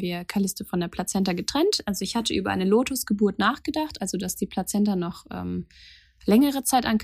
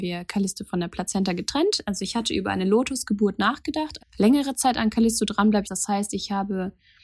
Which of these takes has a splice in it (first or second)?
second